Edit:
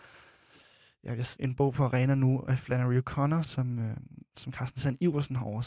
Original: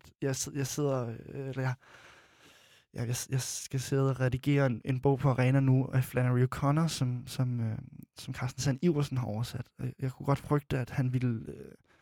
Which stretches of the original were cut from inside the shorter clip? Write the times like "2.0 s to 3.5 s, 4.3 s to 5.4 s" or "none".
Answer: 3.3 s to 4.8 s, 6.9 s to 7.2 s

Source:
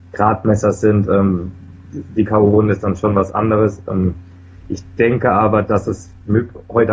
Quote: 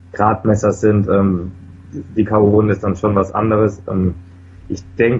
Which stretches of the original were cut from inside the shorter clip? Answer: none

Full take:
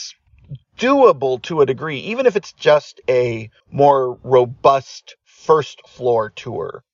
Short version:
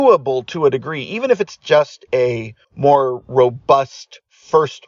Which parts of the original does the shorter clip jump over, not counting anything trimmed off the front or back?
none

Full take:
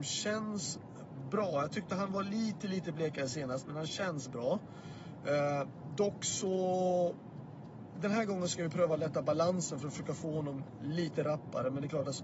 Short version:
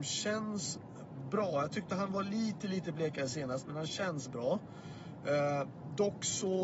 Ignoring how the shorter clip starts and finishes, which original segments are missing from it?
none

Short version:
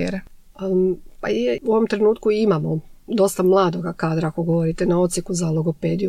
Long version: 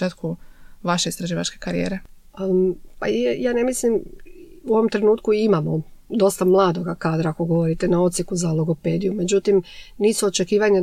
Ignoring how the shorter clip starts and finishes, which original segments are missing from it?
3.4 s to 4.6 s

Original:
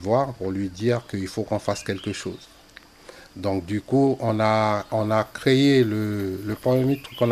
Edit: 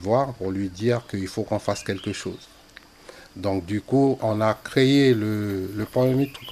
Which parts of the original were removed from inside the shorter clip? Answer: 4.2 s to 4.9 s

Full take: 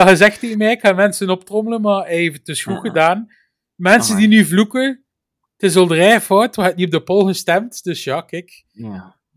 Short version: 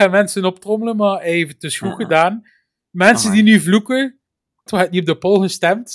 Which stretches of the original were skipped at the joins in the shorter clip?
5.5 s to 6.5 s

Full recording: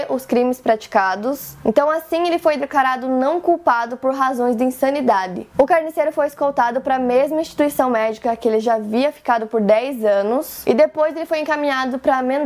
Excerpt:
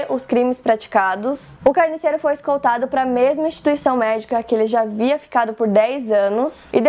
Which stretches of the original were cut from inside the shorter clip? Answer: 1.6 s to 5.5 s

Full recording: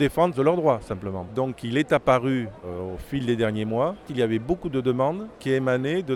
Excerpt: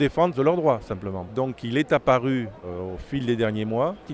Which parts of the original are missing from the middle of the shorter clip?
none

